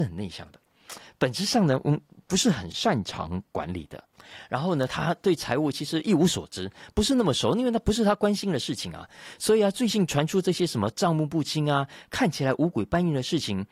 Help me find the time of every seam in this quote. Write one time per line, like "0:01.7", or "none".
none